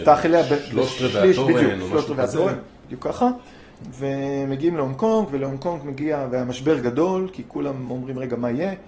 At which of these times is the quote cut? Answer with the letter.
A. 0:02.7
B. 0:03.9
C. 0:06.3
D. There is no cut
A